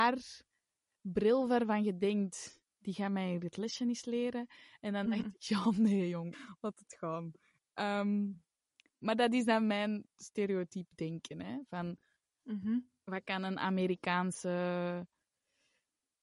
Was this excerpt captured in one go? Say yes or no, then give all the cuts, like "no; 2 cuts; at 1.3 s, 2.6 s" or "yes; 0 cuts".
no; 1 cut; at 6.3 s